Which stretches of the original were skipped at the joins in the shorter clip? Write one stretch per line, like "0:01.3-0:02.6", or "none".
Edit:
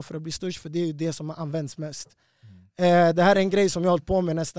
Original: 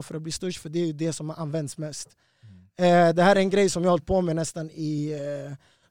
none